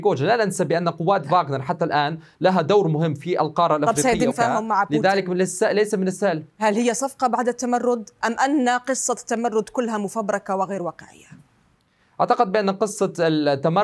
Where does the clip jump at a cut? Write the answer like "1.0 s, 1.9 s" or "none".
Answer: 4.3 s